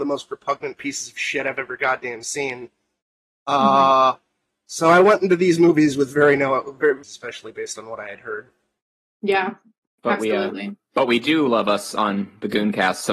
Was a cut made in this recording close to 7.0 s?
yes; 1 cut; at 7.0 s

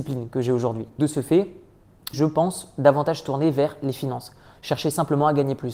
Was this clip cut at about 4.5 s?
no; 2 cuts; at 1.0 s, 2.1 s

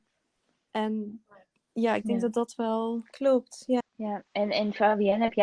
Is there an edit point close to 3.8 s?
yes; 1 cut; at 3.8 s

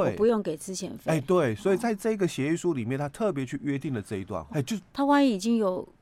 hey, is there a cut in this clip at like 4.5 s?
yes; 1 cut; at 4.5 s

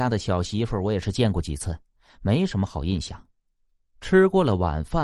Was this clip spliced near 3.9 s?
no; 0 cuts

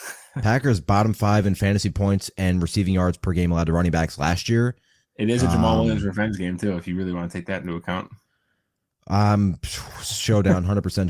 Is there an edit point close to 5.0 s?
yes; 1 cut; at 5.0 s

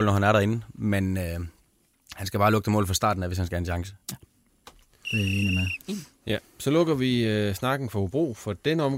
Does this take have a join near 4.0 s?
no; 0 cuts

